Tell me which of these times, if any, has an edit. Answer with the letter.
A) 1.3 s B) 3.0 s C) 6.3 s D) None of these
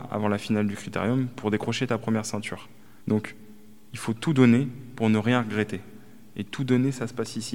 B